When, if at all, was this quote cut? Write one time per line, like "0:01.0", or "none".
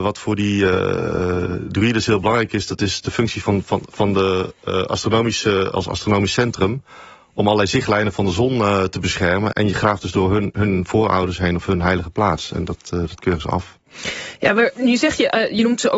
0:09.5